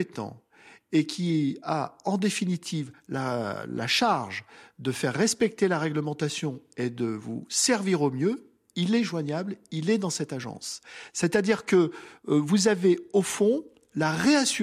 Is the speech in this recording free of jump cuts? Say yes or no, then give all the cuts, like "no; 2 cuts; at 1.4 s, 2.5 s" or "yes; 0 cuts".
yes; 0 cuts